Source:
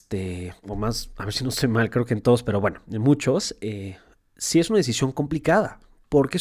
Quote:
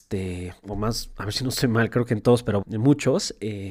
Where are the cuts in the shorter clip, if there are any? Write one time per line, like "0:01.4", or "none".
0:02.6